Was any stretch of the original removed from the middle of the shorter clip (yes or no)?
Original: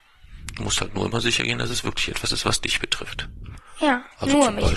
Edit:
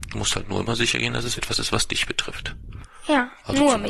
yes